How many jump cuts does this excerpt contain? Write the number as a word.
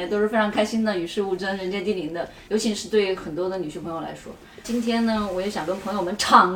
two